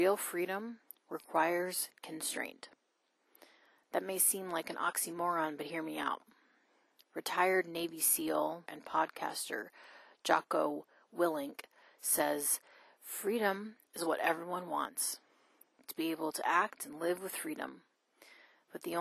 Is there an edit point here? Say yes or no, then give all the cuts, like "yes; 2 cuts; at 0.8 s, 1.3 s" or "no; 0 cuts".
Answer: yes; 1 cut; at 8.7 s